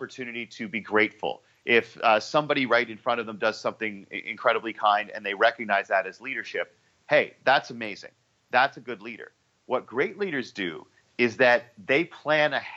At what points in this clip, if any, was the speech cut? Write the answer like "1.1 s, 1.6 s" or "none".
none

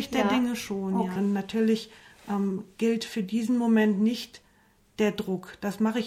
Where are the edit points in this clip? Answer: 1.2 s

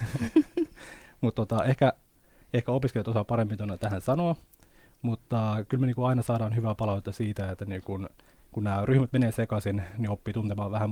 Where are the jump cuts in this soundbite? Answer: none

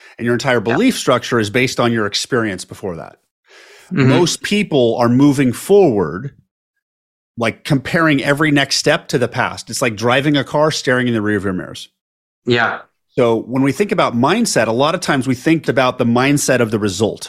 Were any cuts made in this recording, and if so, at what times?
15.6 s

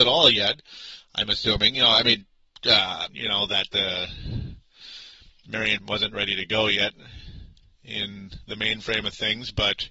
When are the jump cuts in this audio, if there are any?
3.1 s, 5.8 s

